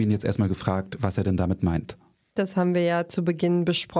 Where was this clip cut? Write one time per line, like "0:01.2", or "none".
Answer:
0:02.4